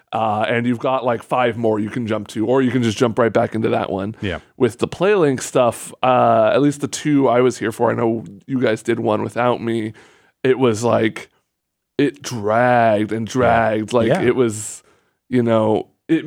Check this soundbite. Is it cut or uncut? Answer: uncut